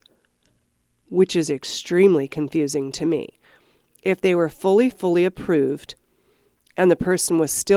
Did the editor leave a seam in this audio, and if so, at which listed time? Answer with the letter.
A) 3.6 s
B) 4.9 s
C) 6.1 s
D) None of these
B